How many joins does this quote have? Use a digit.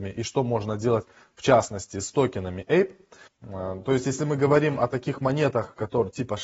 1